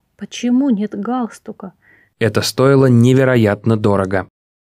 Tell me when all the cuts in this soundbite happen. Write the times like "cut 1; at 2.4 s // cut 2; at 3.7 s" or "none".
cut 1; at 2.1 s